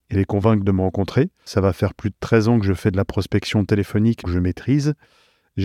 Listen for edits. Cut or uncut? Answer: cut